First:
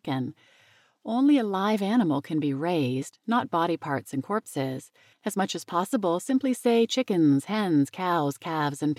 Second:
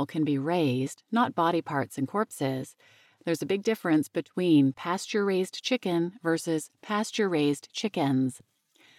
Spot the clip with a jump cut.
first; 1 cut; at 5.1 s

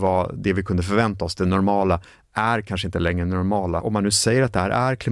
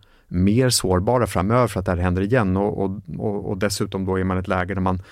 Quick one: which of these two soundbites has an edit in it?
first; 1 cut; at 3.8 s

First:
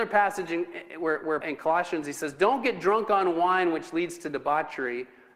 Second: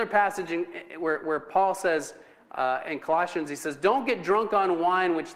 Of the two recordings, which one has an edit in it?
first; 1 cut; at 1.4 s

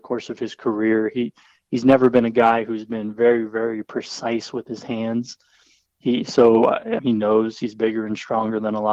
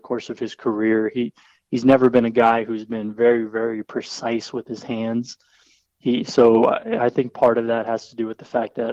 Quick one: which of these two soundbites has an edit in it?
first; 1 cut; at 7.0 s

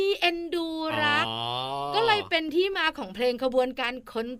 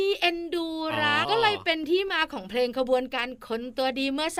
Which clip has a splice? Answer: second; 1 cut; at 1.2 s

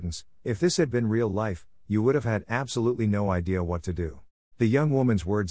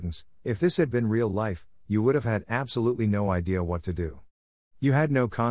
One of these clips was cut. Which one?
first; 1 cut; at 4.5 s

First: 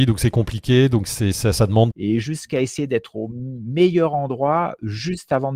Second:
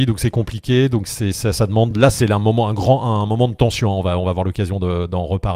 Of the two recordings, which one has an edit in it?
first; 1 cut; at 1.9 s

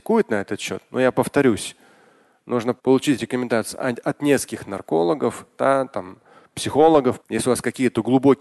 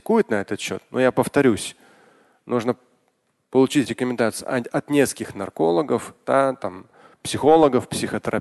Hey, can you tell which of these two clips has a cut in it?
first; 2 cuts; at 2.8 s, 7.2 s

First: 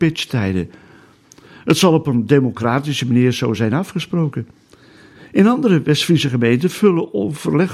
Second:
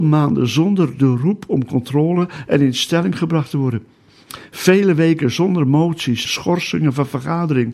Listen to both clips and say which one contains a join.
second; 1 cut; at 6.3 s

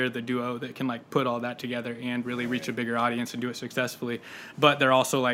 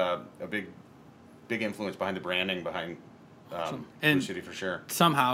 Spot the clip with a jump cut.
second; 1 cut; at 3.9 s

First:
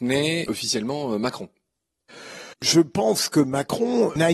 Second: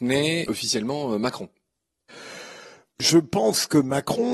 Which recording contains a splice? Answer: first; 1 cut; at 2.5 s

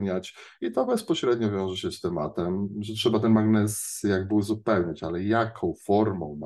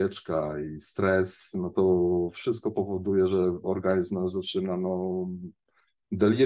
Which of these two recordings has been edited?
second; 1 cut; at 1.7 s

